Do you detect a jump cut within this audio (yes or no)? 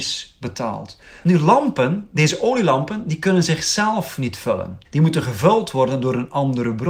yes